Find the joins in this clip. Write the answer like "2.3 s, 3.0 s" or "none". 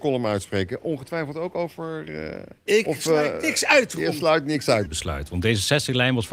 2.6 s, 4.9 s